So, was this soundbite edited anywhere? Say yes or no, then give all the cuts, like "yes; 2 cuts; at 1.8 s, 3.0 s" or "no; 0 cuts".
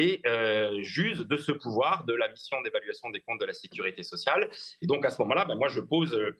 yes; 1 cut; at 4.8 s